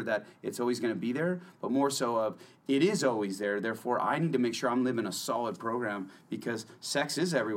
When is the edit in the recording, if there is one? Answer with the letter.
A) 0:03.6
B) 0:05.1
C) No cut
C